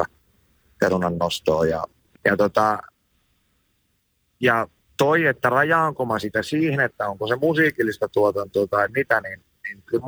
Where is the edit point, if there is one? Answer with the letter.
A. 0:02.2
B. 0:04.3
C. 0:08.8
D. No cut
A